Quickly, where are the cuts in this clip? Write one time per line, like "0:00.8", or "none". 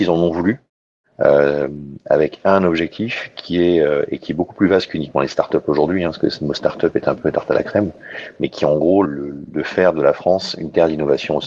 0:09.1